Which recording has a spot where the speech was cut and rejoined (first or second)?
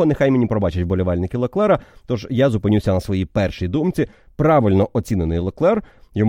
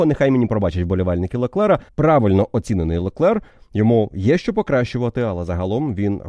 second